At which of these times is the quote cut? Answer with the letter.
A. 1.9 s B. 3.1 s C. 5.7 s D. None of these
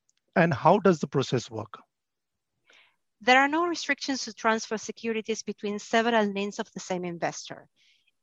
D